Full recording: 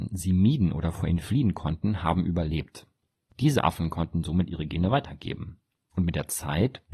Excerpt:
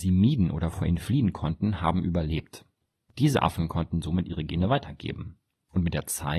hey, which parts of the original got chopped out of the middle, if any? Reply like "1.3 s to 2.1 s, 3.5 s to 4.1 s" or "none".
none

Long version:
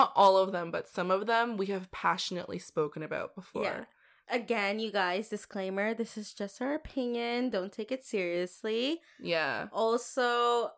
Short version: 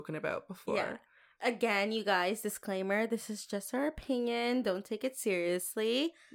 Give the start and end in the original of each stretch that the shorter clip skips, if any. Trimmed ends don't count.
none

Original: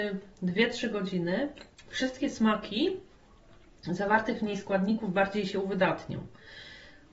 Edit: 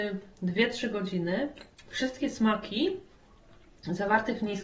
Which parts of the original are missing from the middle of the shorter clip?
none

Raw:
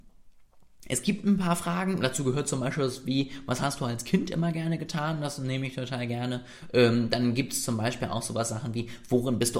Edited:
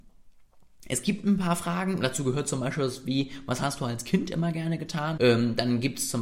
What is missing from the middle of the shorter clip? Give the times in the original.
5.2 s to 6.7 s

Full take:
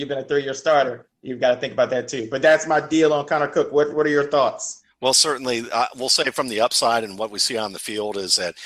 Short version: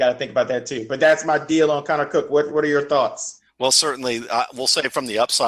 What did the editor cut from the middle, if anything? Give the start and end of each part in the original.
none

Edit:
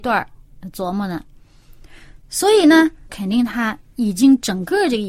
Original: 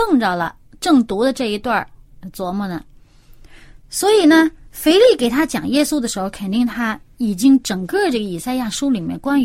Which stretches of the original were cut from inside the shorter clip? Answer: 4.7 s to 6.3 s

